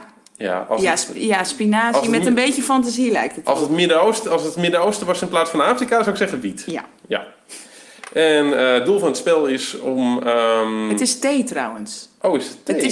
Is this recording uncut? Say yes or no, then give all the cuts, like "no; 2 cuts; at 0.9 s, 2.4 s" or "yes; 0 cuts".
yes; 0 cuts